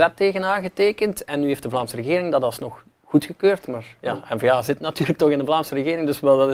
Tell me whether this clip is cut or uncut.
uncut